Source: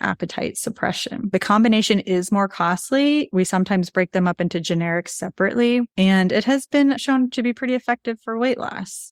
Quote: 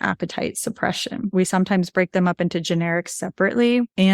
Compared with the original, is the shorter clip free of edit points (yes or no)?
no